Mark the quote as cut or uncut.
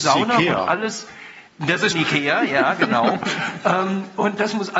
cut